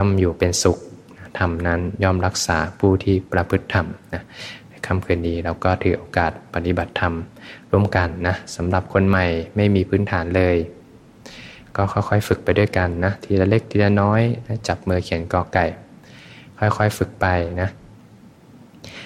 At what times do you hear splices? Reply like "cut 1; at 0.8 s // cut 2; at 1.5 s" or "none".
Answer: none